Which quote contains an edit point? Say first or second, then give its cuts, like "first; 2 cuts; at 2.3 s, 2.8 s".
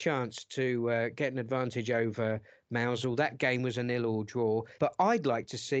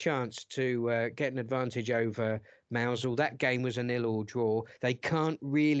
first; 1 cut; at 4.8 s